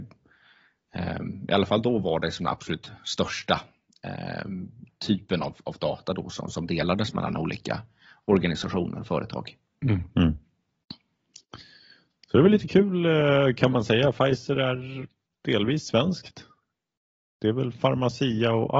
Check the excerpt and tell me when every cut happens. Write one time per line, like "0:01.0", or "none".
none

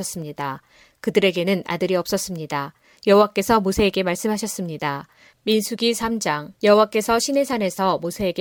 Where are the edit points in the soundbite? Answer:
0:03.0
0:05.3
0:06.5

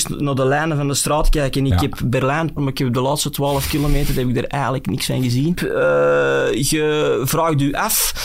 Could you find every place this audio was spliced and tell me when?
0:02.6
0:05.5

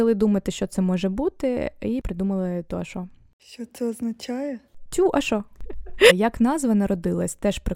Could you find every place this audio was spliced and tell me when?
0:06.1

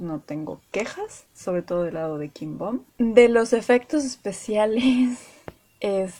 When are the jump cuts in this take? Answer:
0:02.9

